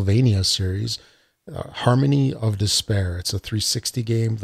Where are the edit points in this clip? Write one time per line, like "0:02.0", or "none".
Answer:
none